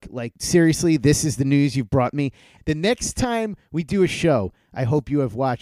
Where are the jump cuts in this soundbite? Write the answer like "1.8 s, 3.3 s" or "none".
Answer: 2.6 s